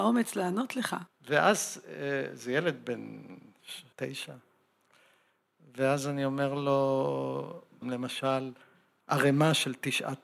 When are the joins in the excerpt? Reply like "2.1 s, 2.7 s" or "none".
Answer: 1.1 s, 3.9 s, 7.8 s